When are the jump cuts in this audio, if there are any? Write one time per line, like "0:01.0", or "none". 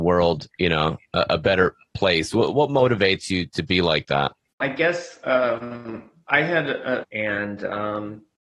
0:04.6
0:07.0